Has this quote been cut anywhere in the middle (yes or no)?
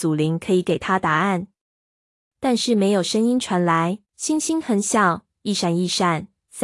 yes